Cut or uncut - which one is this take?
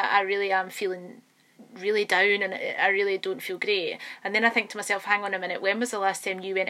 uncut